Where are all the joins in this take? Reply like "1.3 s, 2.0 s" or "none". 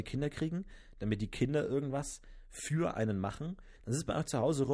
3.8 s